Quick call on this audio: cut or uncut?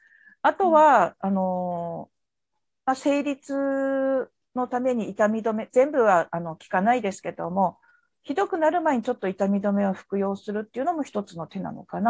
uncut